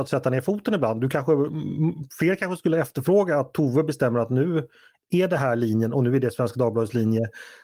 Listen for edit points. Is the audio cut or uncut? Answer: uncut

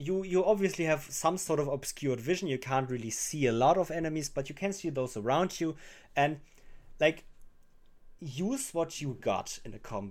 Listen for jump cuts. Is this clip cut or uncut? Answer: uncut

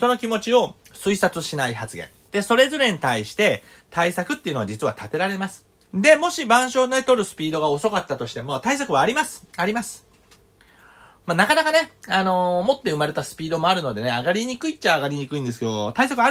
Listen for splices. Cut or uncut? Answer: cut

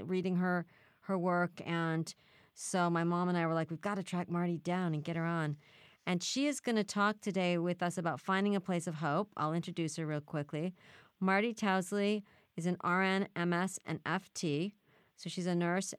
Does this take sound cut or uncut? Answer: uncut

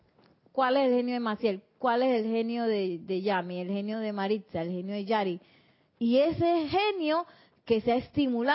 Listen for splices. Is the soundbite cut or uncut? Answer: uncut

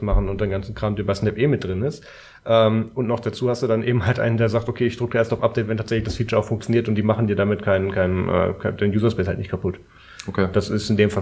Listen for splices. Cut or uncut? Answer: uncut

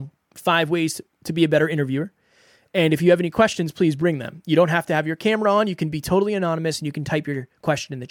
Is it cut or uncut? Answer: uncut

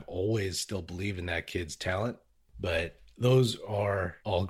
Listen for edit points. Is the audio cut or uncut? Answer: cut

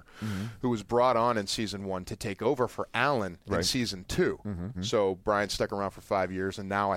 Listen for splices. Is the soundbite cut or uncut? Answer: cut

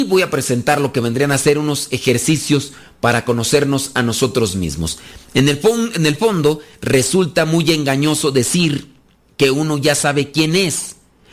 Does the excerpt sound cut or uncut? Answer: uncut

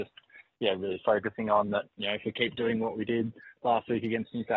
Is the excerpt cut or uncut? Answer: uncut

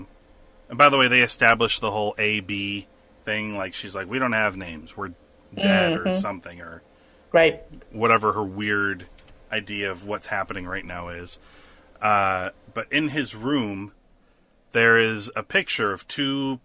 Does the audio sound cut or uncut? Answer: uncut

